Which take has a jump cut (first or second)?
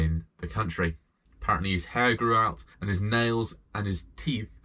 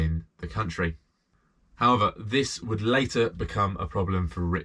first